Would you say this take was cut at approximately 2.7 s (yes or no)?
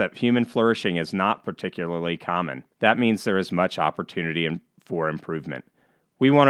yes